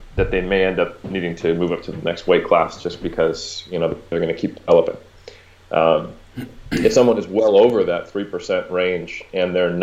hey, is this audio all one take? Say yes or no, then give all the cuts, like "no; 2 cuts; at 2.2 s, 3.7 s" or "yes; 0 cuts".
yes; 0 cuts